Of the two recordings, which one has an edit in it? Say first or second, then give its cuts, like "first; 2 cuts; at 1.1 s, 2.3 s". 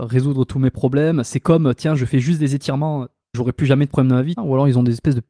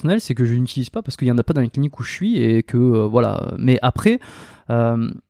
first; 2 cuts; at 3.3 s, 4.4 s